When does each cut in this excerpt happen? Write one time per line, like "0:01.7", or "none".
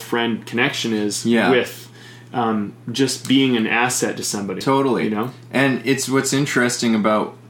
none